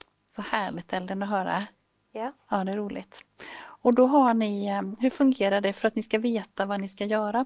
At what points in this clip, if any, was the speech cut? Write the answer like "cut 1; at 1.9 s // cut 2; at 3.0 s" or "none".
none